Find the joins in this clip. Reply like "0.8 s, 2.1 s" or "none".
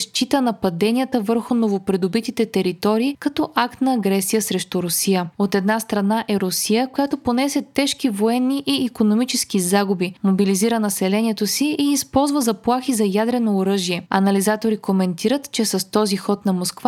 5.3 s, 14.1 s